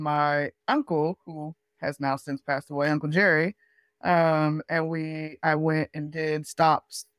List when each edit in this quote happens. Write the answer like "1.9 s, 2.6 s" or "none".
none